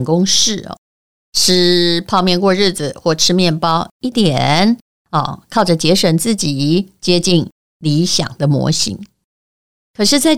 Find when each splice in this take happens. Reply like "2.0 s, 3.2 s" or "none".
4.1 s